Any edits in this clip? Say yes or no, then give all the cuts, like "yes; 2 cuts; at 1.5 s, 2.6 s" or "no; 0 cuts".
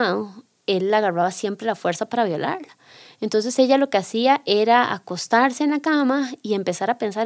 no; 0 cuts